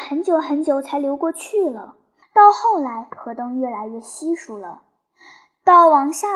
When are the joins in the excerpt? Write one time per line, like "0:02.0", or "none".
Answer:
0:02.2